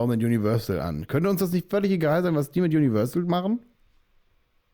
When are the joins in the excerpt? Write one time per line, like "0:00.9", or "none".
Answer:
none